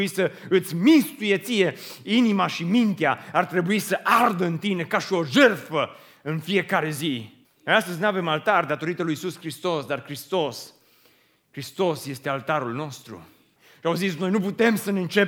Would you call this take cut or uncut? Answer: cut